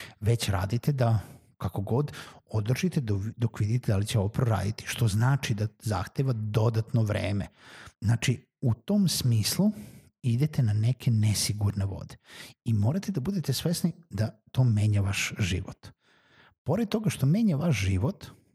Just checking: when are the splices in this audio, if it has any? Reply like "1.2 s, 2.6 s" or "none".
7.9 s